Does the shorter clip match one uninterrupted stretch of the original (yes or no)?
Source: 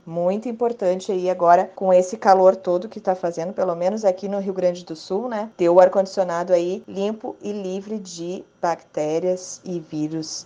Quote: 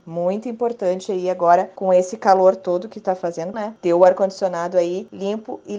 no